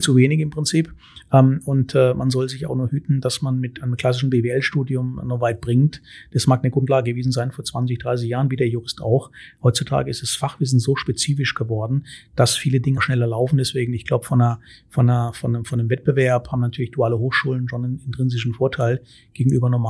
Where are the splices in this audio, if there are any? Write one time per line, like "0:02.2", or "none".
0:13.0